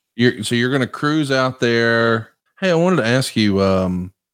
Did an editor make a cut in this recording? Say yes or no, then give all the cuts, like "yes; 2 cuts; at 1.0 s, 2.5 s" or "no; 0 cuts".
yes; 1 cut; at 2.5 s